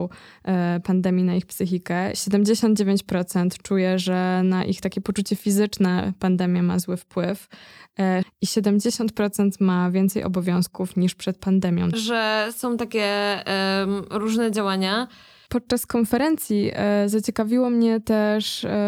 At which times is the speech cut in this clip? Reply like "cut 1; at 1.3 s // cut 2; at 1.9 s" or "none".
cut 1; at 2.1 s // cut 2; at 8.2 s // cut 3; at 11.9 s